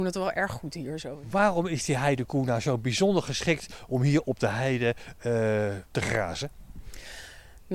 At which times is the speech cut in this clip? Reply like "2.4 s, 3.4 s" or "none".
5.9 s